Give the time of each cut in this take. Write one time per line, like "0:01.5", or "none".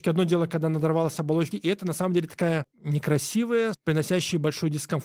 0:01.5
0:03.7